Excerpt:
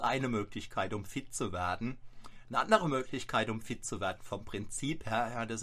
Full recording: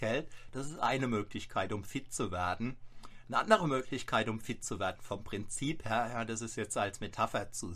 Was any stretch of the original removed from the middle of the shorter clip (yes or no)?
no